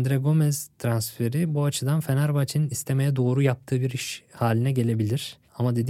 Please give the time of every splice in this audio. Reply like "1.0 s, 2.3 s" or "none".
2.7 s